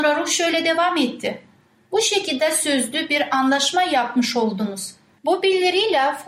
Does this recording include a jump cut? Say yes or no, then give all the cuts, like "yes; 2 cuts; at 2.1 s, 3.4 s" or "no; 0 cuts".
yes; 1 cut; at 5.2 s